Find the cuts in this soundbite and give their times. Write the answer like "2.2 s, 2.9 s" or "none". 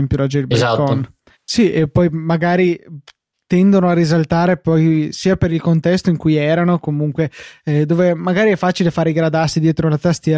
1.3 s